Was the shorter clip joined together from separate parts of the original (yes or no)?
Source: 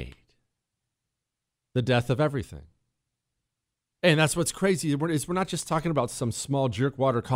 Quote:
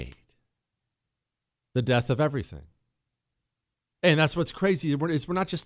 no